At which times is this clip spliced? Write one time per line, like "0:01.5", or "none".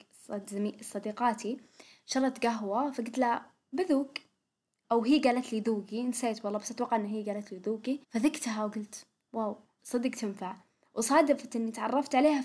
0:08.0
0:09.8